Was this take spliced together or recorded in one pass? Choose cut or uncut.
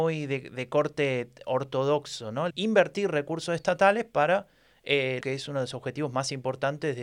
cut